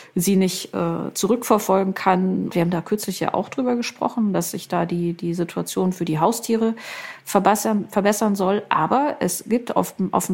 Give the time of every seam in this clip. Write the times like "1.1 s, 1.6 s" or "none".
2.5 s